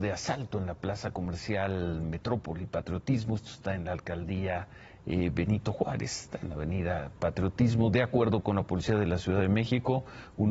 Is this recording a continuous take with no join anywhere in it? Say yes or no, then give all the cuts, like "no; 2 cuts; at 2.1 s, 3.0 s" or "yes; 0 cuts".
yes; 0 cuts